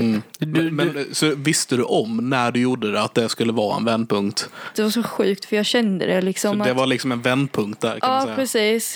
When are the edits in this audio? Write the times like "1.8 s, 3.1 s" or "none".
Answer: 4.7 s